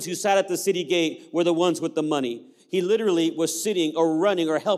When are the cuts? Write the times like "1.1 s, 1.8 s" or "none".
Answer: none